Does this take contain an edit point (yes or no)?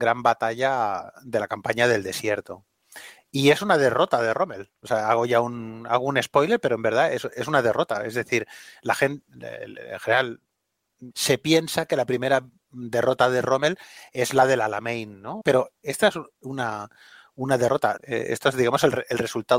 yes